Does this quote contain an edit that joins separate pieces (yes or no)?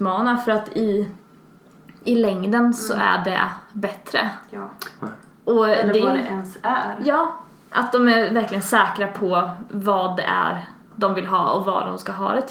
yes